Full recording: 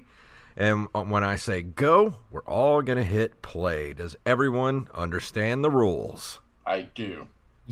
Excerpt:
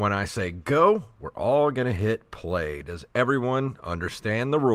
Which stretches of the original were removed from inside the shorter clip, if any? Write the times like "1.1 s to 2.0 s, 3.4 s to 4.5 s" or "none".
none